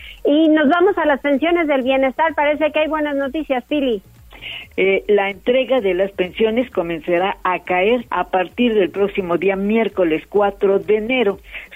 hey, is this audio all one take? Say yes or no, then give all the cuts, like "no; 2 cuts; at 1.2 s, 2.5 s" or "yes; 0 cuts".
no; 2 cuts; at 4.7 s, 8.1 s